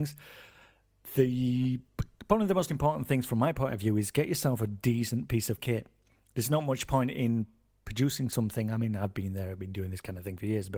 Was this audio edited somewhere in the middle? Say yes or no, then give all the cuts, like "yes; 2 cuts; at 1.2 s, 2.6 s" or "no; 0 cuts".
no; 0 cuts